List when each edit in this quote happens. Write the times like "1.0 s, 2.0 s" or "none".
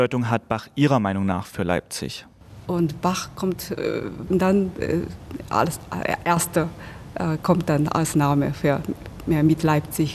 2.6 s, 4.3 s